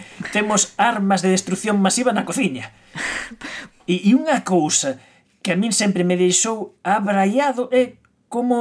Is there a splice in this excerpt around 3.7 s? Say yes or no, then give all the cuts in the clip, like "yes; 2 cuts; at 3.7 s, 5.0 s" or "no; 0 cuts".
yes; 1 cut; at 3.7 s